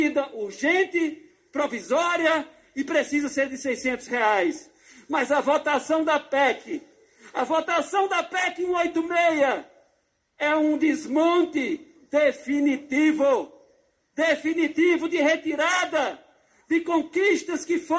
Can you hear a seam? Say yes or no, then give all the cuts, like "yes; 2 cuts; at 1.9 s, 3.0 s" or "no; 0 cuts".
no; 0 cuts